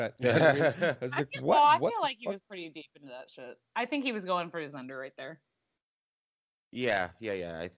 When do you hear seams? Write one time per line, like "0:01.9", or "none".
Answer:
none